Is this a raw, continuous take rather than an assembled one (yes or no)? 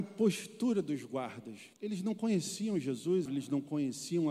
no